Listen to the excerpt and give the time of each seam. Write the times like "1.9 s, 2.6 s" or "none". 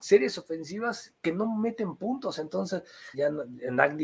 3.1 s